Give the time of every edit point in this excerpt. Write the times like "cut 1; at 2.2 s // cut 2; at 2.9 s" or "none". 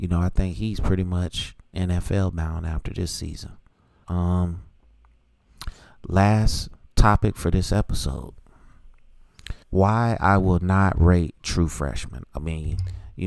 cut 1; at 4.0 s // cut 2; at 9.6 s // cut 3; at 12.2 s